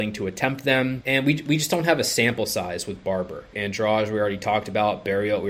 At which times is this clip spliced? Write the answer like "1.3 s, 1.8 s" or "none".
1.0 s, 3.5 s